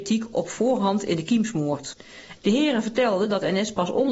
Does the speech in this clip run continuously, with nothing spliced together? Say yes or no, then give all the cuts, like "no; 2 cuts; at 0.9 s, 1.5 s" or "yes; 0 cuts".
no; 1 cut; at 2.4 s